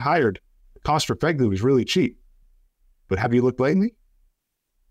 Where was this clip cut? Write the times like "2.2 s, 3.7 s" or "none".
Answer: none